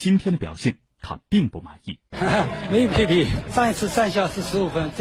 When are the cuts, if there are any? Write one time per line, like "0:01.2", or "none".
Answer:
none